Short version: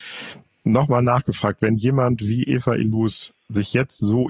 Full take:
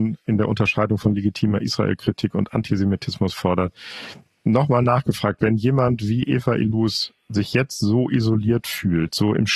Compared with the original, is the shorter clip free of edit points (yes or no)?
yes